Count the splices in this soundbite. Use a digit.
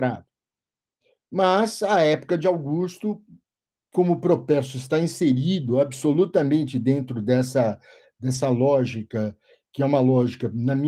0